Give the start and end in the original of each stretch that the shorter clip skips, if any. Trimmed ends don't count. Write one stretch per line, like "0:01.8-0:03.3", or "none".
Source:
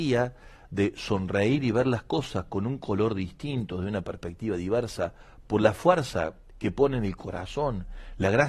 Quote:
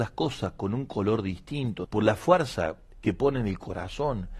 0:03.8-0:05.4